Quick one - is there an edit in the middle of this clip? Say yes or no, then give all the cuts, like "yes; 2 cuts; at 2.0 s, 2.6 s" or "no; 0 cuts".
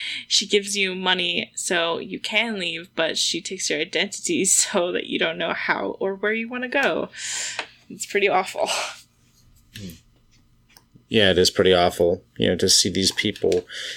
no; 0 cuts